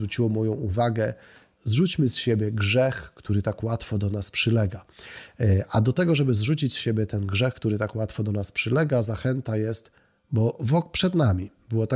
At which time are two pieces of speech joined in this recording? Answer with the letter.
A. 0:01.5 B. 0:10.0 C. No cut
C